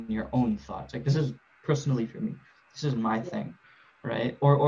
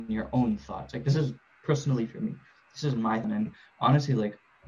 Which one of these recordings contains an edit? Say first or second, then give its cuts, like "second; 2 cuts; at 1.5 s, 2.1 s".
second; 1 cut; at 3.2 s